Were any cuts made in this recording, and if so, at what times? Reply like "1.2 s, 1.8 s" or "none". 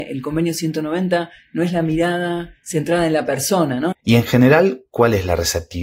3.9 s